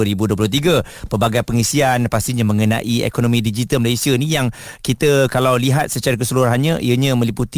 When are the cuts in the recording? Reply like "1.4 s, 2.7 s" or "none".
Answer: none